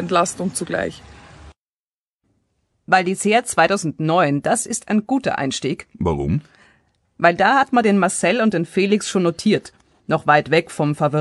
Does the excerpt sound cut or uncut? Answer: uncut